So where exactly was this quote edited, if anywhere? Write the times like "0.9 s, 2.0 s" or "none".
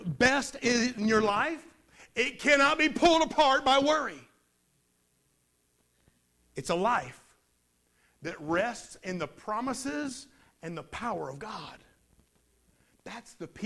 none